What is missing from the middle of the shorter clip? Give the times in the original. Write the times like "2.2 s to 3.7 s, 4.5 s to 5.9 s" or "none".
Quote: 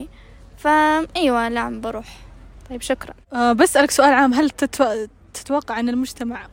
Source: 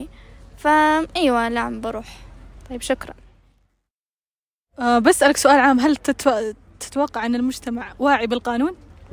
3.2 s to 4.7 s